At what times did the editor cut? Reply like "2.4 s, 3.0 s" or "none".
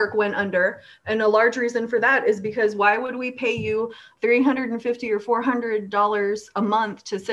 none